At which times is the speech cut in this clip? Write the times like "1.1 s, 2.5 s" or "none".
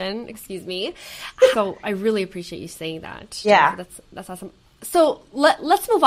1.5 s